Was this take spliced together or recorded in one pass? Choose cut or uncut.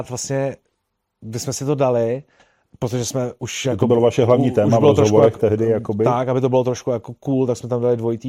uncut